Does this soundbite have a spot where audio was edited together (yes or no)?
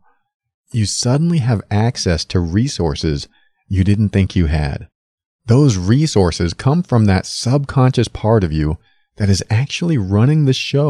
no